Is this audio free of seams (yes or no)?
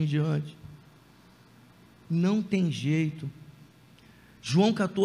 yes